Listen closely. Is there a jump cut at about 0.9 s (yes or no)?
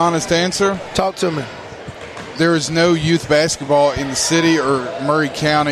no